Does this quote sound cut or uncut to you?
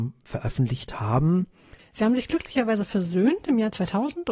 cut